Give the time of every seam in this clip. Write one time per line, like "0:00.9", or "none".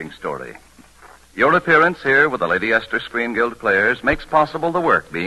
none